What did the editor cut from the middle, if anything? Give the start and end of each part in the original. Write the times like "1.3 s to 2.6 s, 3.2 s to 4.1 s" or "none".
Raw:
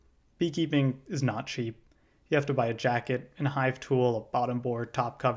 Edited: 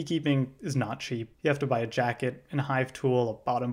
1.8 s to 2.2 s